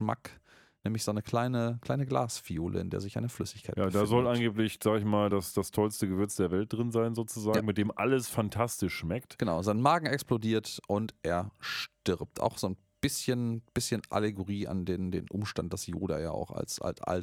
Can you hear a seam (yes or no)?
no